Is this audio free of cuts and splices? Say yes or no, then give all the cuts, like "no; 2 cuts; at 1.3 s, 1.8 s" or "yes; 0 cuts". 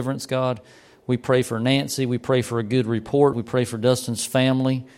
no; 1 cut; at 3.3 s